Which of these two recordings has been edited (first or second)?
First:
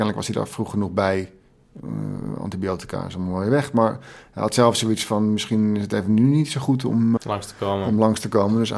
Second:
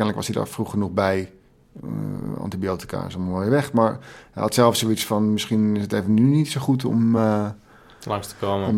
first